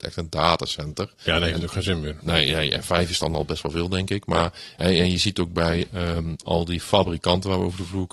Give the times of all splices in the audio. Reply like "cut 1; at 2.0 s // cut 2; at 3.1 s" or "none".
none